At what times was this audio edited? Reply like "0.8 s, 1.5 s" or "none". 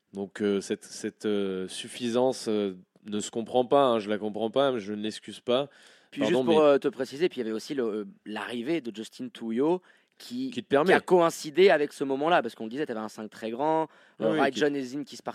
none

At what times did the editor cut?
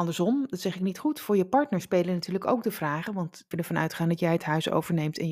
3.5 s

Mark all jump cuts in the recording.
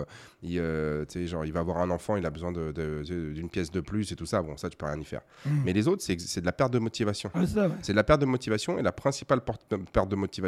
none

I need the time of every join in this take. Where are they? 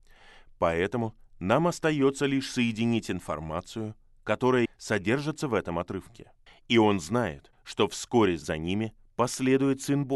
4.7 s, 6.5 s

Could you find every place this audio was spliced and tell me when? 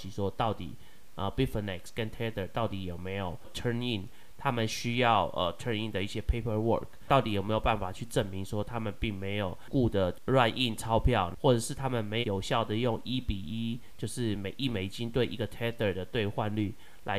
12.2 s

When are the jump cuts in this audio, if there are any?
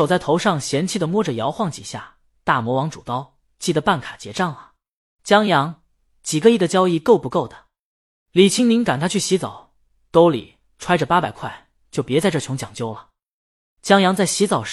none

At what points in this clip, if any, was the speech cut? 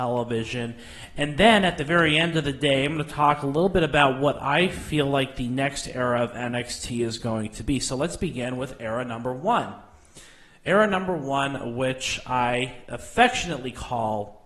none

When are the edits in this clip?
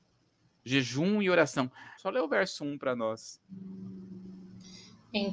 2.0 s

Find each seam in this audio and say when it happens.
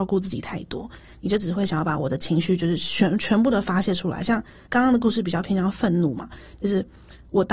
none

